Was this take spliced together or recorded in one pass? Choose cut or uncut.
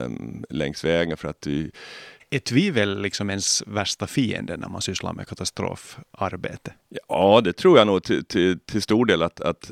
uncut